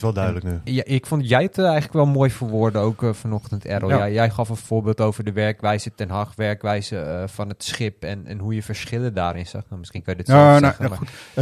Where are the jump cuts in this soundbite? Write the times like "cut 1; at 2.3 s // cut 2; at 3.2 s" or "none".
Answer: none